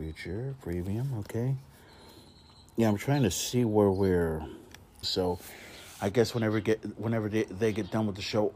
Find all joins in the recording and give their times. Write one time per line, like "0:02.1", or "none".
0:05.0